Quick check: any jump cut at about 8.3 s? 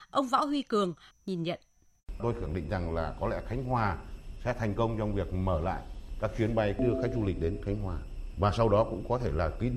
no; 1 cut; at 1.1 s

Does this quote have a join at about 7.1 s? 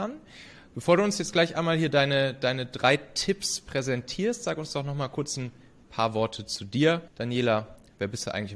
yes; 1 cut; at 7.1 s

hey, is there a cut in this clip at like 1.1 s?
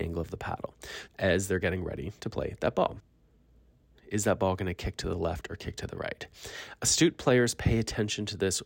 yes; 2 cuts; at 1.1 s, 4.0 s

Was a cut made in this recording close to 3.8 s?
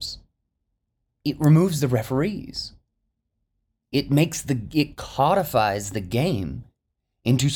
no; 0 cuts

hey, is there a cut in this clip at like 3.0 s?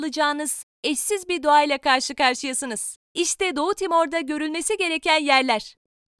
yes; 1 cut; at 3.0 s

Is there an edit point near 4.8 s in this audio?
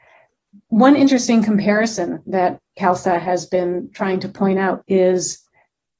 yes; 1 cut; at 4.8 s

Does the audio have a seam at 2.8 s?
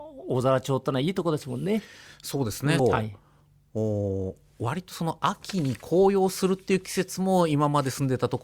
yes; 1 cut; at 2.8 s

